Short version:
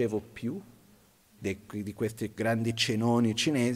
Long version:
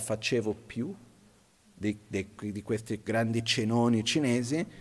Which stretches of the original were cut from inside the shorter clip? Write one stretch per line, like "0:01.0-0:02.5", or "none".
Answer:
0:01.7-0:02.1

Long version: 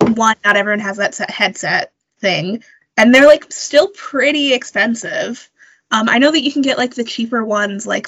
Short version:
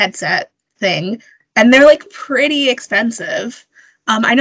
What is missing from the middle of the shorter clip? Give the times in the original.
0:03.5-0:03.9

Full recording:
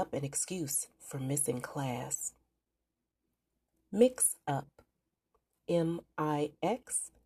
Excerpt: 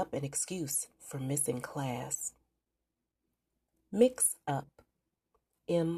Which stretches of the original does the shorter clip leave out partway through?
none

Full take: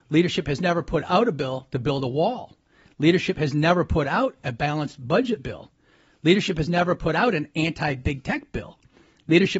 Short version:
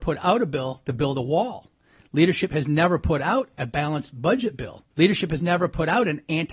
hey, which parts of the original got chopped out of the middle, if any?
0:05.8-0:06.2

